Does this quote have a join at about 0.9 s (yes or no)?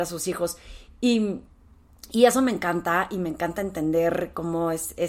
no